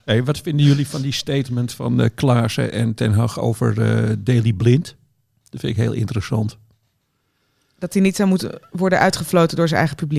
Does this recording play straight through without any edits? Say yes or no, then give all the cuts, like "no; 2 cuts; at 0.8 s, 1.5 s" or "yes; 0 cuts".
yes; 0 cuts